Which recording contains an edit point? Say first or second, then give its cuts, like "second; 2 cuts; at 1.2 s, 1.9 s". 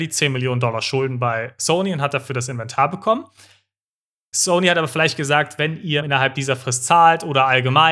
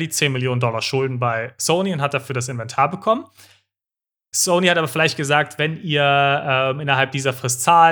first; 1 cut; at 6.0 s